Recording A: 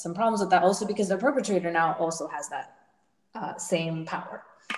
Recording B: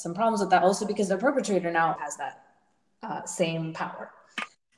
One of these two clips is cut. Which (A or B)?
B